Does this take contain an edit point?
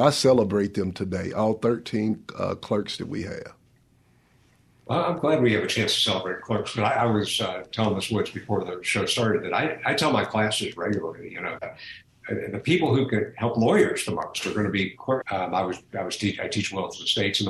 yes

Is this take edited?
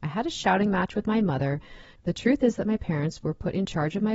yes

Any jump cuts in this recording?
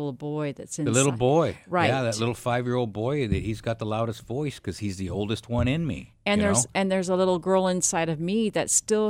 no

